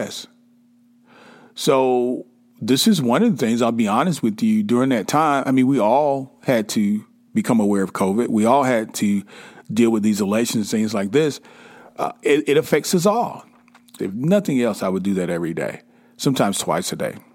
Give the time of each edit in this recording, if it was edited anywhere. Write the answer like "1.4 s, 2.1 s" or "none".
14.0 s

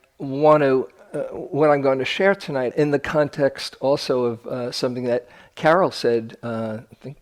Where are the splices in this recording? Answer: 2.7 s

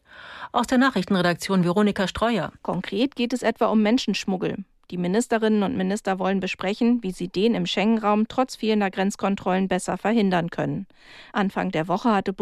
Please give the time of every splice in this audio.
2.6 s

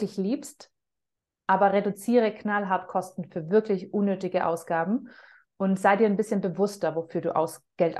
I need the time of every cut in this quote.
none

